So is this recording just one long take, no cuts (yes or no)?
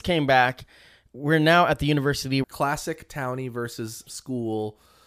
no